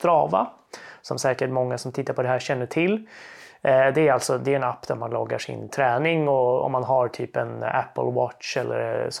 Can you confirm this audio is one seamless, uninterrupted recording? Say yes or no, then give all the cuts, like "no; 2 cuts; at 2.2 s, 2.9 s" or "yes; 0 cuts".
yes; 0 cuts